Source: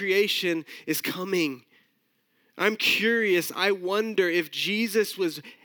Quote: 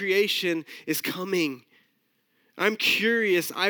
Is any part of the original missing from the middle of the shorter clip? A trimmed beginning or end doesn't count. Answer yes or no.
no